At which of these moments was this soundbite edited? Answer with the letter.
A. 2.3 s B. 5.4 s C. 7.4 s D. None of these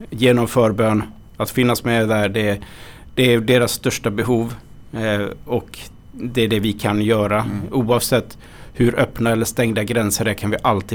D